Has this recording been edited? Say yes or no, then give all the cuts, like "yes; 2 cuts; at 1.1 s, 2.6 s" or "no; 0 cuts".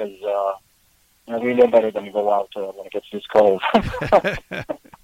no; 0 cuts